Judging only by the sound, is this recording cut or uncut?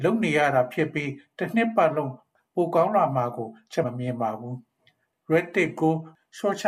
cut